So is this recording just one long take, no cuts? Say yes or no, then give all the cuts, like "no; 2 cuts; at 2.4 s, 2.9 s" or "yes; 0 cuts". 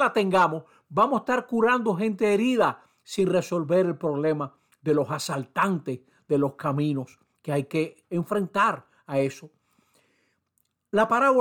yes; 0 cuts